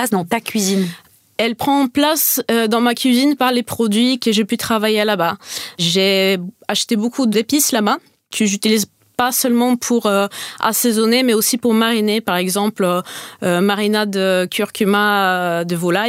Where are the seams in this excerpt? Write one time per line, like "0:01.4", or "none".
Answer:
none